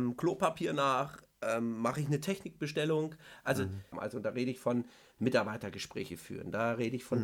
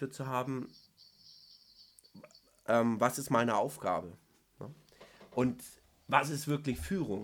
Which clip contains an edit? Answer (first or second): first